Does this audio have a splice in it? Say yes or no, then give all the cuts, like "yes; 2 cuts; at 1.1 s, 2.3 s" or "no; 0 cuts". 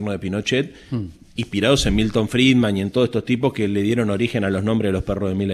no; 0 cuts